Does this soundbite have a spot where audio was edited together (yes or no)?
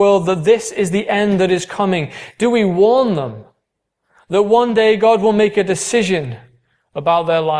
no